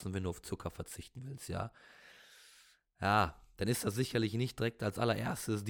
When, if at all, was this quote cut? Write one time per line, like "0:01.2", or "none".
none